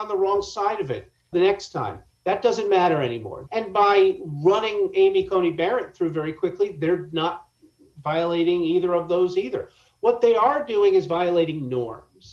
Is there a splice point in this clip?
yes; 1 cut; at 3.5 s

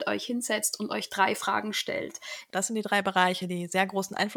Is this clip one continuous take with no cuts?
no; 1 cut; at 2.5 s

